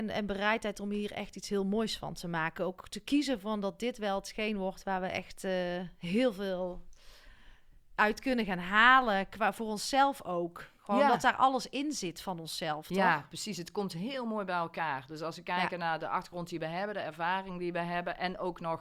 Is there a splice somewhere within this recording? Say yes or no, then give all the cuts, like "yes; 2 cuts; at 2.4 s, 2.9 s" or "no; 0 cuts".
no; 0 cuts